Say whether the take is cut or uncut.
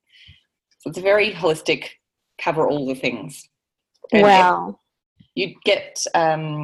uncut